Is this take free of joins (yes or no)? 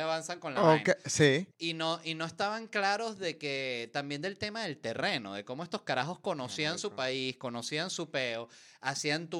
no